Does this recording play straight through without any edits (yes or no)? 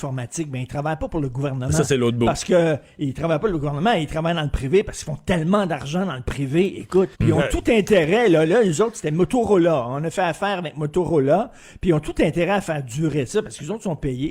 no